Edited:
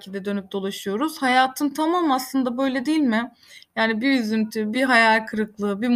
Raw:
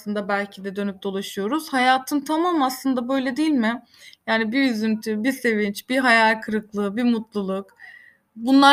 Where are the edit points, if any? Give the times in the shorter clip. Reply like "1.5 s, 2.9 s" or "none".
4.7 s